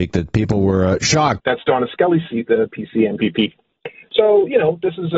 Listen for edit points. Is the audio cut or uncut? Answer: cut